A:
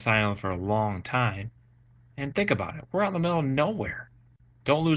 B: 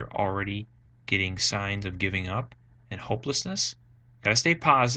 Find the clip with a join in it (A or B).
B